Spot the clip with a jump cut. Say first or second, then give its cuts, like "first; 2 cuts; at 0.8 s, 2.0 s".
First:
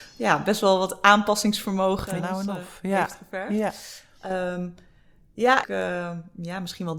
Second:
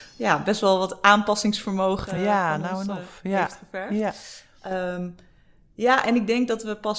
first; 2 cuts; at 2.2 s, 5.6 s